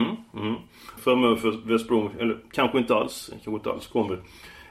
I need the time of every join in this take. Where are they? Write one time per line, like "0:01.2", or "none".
0:01.0